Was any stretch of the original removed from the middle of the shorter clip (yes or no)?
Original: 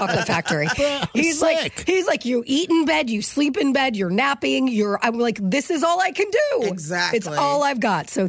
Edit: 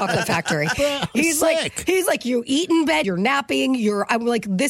yes